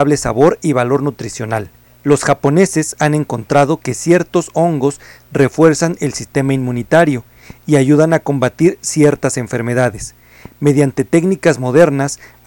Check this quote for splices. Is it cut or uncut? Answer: cut